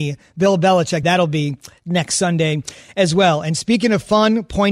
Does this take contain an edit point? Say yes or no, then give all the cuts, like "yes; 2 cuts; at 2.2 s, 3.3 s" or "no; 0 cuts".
yes; 1 cut; at 1.0 s